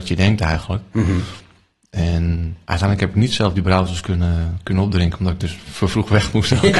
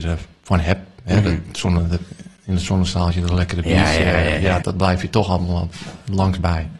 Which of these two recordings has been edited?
second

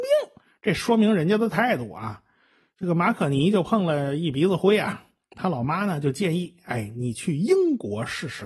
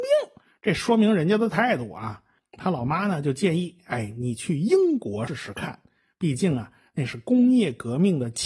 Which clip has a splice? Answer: second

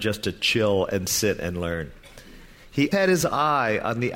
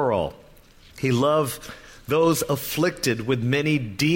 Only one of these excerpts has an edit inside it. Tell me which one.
first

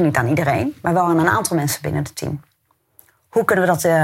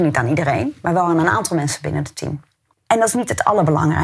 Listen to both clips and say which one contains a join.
second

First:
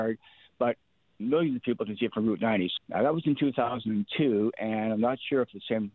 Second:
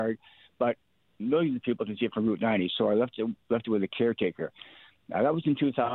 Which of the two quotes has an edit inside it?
first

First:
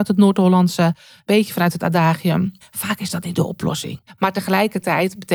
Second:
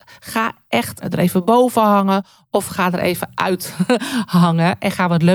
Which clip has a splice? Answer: first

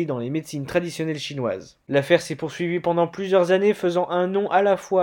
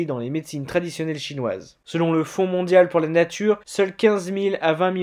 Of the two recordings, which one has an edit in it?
first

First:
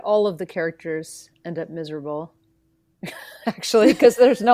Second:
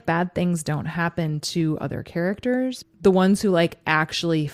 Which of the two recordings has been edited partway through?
second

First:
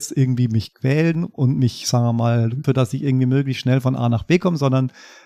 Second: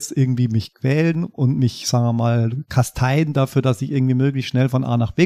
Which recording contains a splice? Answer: first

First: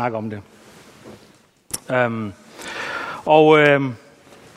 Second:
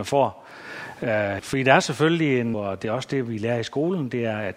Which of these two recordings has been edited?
second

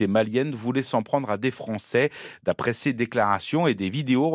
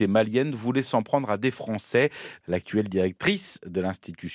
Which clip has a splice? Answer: second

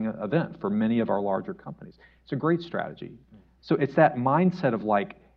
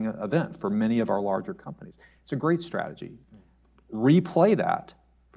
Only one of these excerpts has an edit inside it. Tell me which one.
first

